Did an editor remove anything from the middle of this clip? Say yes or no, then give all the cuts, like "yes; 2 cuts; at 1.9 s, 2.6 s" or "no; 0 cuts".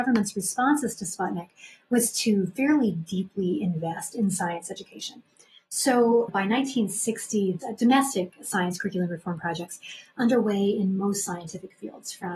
yes; 2 cuts; at 6.3 s, 7.6 s